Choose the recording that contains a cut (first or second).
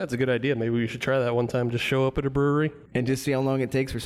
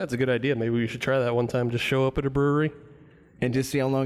first